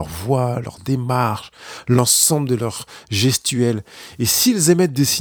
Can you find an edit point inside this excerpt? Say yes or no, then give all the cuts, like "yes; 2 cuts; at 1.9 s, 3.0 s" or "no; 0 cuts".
no; 0 cuts